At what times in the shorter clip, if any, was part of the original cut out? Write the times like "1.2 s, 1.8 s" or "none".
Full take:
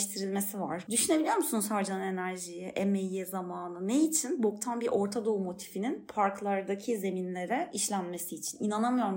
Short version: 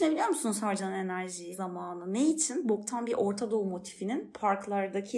1.5 s